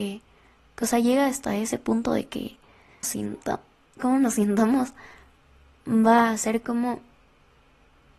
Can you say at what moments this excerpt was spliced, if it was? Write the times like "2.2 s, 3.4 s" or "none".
3.0 s